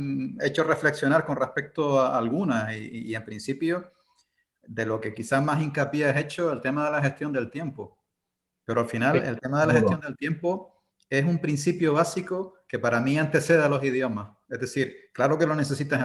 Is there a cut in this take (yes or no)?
no